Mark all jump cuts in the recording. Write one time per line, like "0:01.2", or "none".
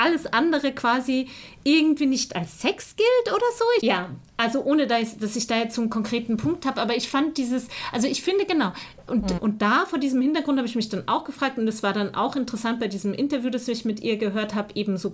0:03.8
0:09.4